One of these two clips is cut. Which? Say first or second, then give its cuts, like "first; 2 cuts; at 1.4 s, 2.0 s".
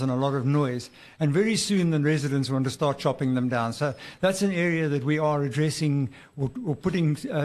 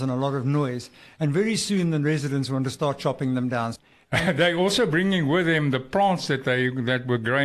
second; 1 cut; at 3.8 s